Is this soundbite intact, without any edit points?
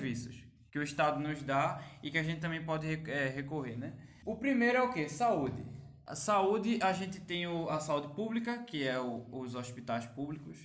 yes; 0 cuts

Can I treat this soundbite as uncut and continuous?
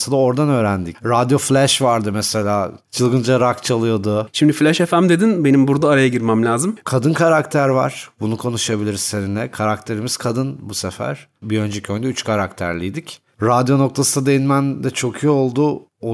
no; 1 cut; at 6.8 s

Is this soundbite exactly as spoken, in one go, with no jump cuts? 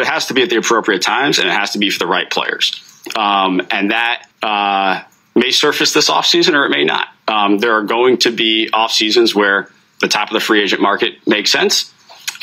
no; 1 cut; at 4.3 s

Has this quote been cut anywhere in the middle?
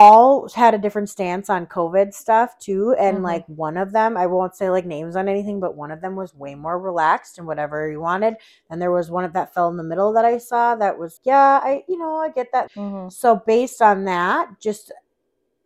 yes; 2 cuts; at 11.2 s, 12.7 s

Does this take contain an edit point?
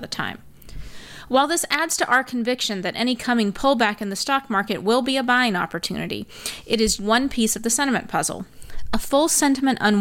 yes; 1 cut; at 7.0 s

